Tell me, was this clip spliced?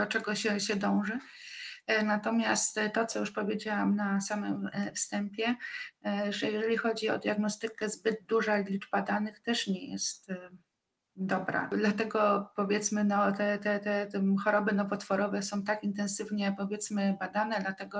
no; 0 cuts

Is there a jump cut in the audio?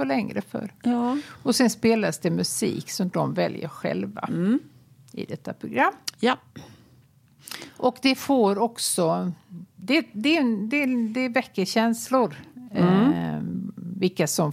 no; 0 cuts

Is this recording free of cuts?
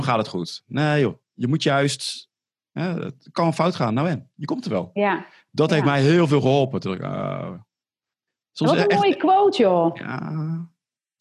yes; 0 cuts

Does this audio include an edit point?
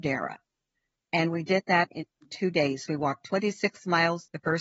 no; 0 cuts

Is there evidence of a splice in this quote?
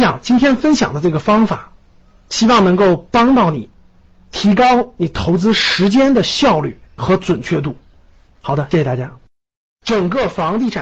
yes; 1 cut; at 8.7 s

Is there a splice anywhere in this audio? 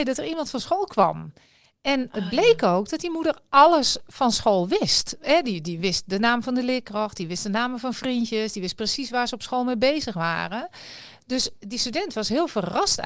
no; 0 cuts

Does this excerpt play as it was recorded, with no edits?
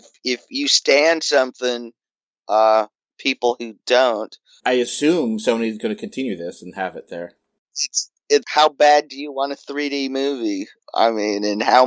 no; 3 cuts; at 3.0 s, 4.6 s, 8.4 s

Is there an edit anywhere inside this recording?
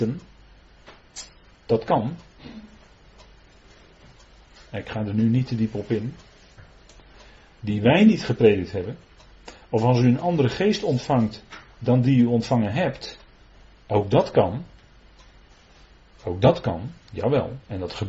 no; 0 cuts

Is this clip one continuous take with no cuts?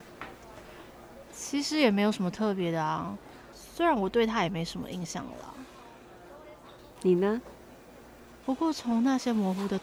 no; 3 cuts; at 3.5 s, 7.0 s, 8.4 s

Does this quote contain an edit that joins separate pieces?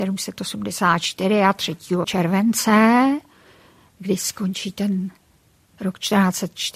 yes; 1 cut; at 2.0 s

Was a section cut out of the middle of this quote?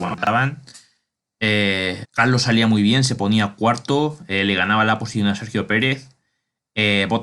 yes; 1 cut; at 2.0 s

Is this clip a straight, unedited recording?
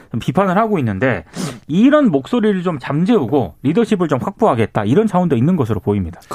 yes; 0 cuts

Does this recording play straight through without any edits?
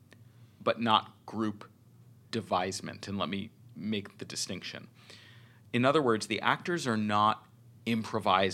yes; 0 cuts

